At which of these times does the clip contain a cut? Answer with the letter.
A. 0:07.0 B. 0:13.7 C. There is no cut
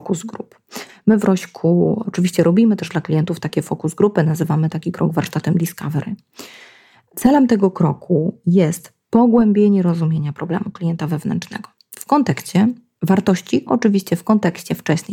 B